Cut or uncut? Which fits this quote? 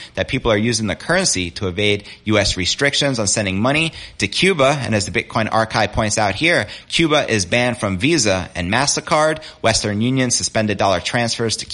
uncut